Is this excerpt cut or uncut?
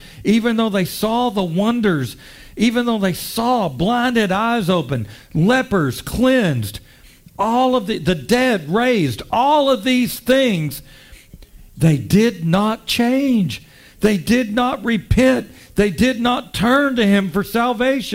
uncut